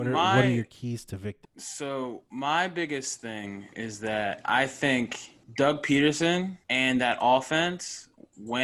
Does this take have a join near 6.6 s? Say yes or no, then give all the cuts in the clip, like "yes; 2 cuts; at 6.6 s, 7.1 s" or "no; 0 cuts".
yes; 3 cuts; at 1.4 s, 5.4 s, 6.6 s